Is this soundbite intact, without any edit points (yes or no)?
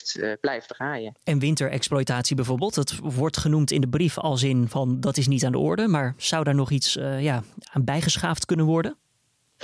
yes